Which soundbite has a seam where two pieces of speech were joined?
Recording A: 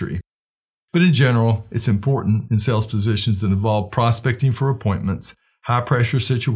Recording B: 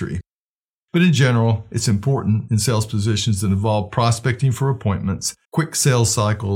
B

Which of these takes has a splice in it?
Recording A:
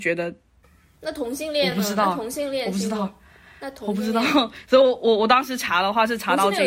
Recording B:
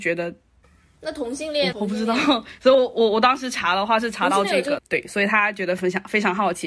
B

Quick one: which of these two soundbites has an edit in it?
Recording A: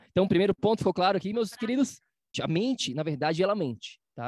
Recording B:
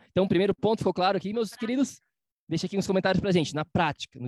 A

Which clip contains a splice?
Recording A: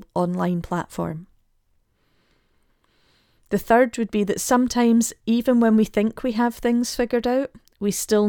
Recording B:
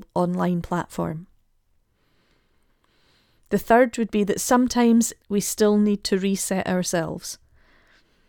B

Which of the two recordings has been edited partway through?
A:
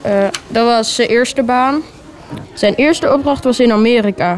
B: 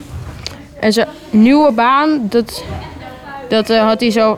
A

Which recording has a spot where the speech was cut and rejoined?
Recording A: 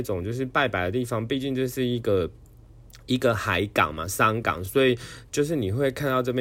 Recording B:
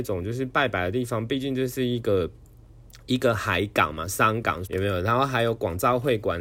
B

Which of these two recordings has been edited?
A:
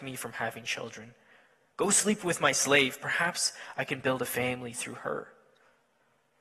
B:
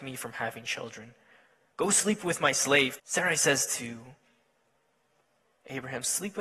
B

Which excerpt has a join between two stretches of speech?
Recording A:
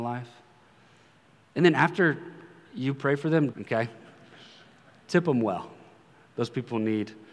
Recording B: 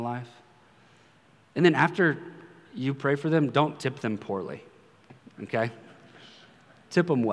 A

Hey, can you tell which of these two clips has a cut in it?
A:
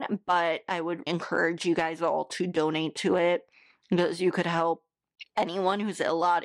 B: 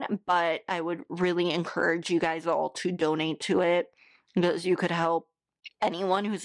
A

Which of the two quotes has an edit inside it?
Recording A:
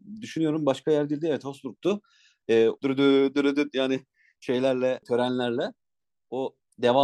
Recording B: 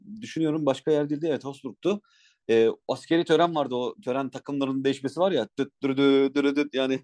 A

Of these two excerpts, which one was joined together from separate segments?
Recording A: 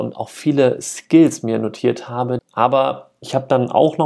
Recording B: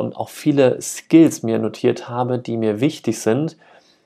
A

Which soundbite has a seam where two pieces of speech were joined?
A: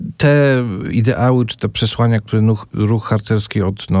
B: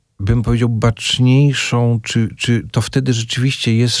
B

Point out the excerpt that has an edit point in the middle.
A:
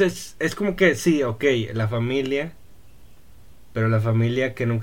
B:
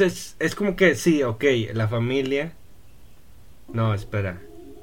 B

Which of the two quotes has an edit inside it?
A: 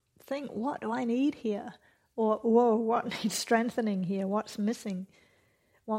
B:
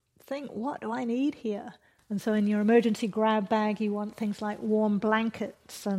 B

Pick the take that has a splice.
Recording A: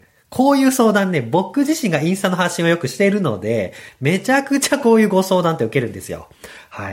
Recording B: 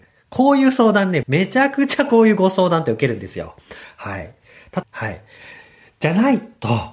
B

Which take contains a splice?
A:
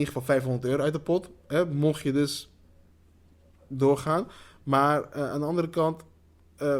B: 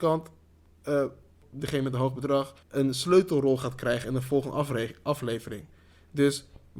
B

